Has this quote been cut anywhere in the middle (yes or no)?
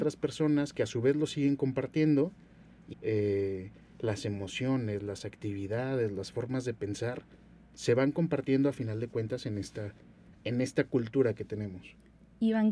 yes